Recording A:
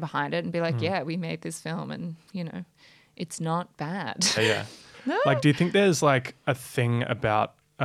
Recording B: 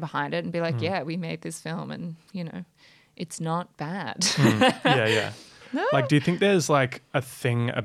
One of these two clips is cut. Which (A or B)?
A